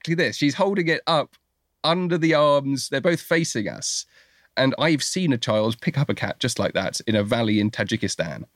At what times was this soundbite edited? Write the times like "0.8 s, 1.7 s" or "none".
none